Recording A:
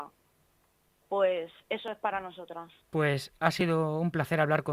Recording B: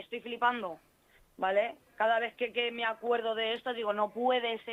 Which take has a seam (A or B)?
A